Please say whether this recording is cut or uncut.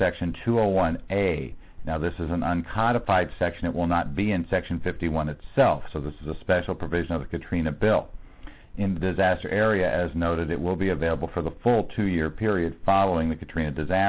uncut